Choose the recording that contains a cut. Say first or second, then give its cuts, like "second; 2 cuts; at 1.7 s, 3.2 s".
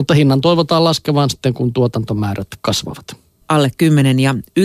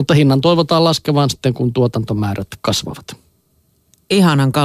first; 1 cut; at 3.4 s